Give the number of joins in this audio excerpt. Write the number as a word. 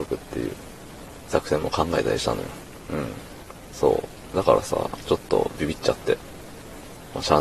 one